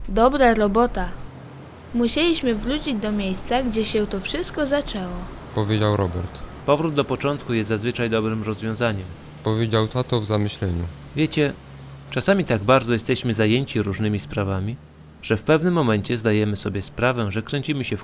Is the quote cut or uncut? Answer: cut